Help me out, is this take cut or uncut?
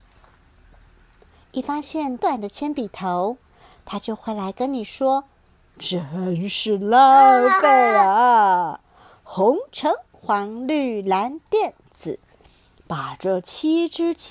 cut